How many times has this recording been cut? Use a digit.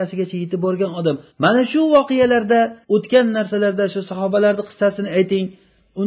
2